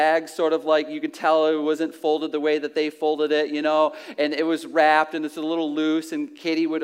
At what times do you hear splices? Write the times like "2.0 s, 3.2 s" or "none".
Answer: none

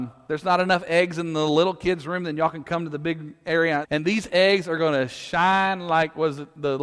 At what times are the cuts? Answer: 3.8 s

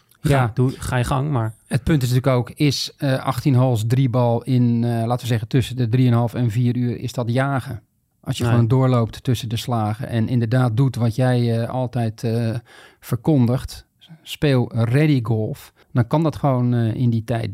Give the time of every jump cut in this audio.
8.1 s, 15.8 s

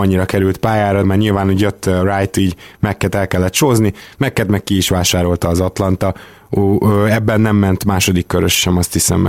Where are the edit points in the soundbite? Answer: 1.0 s

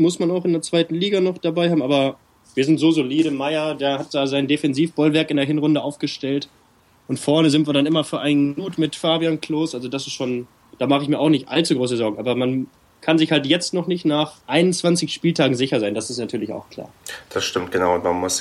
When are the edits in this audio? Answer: 14.4 s

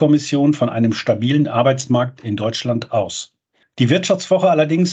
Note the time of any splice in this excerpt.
none

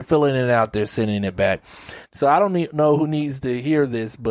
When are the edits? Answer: 2.0 s

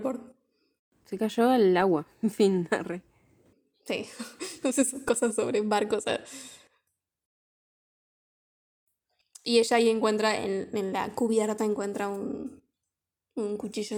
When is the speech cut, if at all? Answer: none

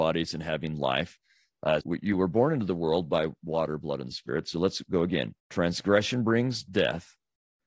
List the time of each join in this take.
1.8 s, 5.4 s

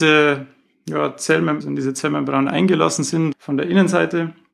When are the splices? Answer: 1.6 s, 3.3 s

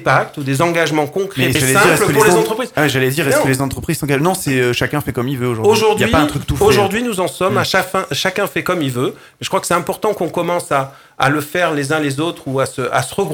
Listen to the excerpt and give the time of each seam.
1.5 s

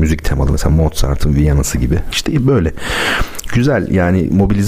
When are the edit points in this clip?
2.1 s

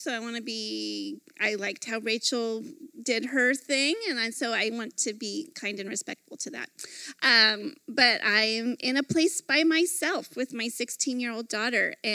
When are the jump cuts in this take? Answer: none

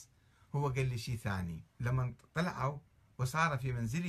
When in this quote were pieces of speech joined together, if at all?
1.7 s

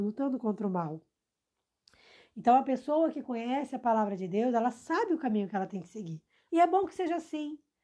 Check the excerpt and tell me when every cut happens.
6.5 s

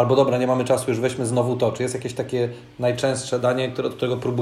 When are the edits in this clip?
none

